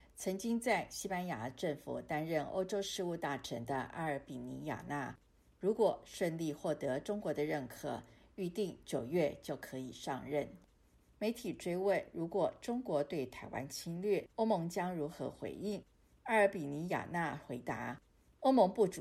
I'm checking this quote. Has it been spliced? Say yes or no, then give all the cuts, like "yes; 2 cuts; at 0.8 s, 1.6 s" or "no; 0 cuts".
yes; 2 cuts; at 11.0 s, 14.3 s